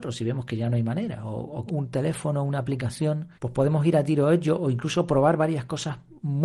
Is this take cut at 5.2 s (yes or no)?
no